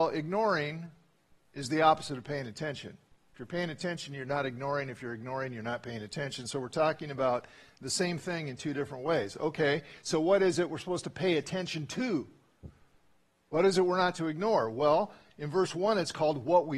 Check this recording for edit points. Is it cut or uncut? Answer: uncut